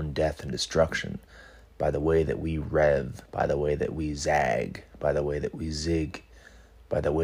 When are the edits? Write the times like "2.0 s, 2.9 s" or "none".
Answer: none